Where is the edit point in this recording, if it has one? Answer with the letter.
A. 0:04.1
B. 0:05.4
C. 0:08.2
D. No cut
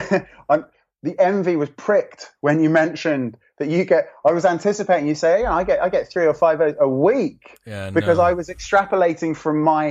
D